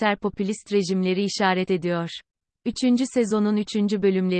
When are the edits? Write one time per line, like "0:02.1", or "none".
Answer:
0:02.6